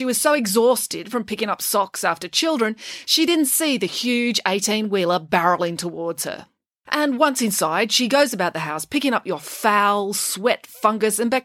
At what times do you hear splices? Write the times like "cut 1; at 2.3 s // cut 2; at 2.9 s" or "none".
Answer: cut 1; at 6.9 s